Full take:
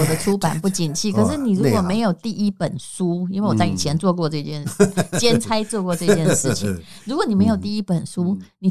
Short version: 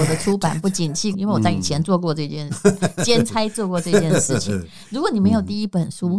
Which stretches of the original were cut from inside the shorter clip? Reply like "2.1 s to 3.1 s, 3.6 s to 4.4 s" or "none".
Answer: 1.1 s to 3.3 s